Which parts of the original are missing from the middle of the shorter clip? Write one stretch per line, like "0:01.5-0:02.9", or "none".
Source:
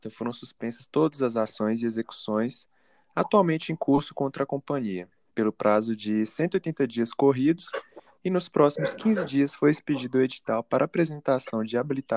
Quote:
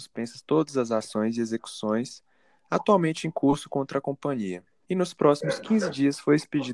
0:05.3-0:08.2